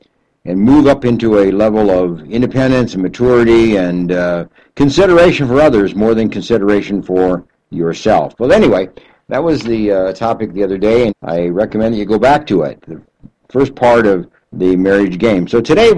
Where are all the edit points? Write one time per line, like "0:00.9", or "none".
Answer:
0:11.1
0:14.4

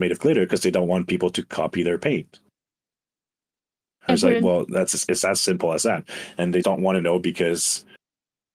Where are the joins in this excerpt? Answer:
0:06.6

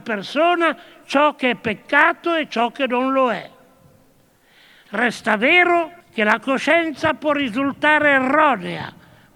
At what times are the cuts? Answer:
0:06.0

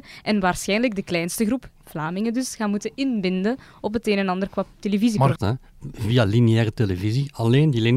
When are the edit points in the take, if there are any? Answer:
0:05.4

